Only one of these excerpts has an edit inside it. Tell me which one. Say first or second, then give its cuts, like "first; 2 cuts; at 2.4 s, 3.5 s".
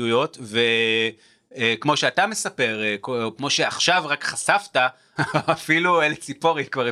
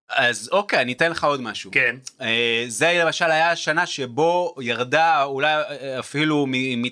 first; 2 cuts; at 3.4 s, 5.2 s